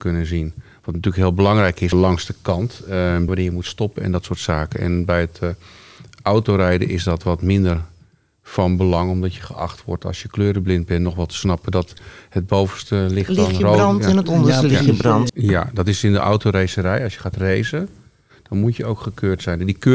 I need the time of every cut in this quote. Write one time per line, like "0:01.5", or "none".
0:01.9
0:03.3
0:15.3